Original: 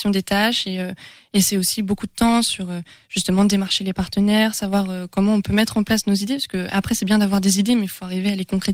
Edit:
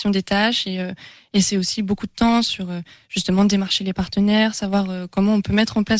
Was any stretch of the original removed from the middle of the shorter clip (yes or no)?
no